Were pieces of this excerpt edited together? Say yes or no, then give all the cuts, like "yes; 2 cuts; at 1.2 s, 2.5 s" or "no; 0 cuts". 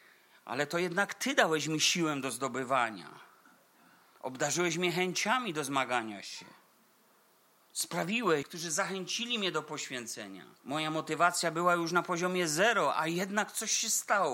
yes; 2 cuts; at 8.4 s, 10.6 s